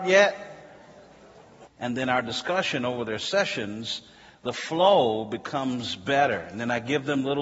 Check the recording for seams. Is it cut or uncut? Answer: cut